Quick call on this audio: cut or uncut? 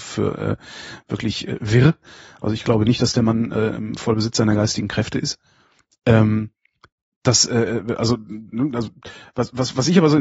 uncut